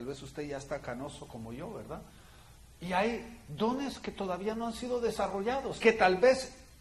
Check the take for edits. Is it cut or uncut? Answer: cut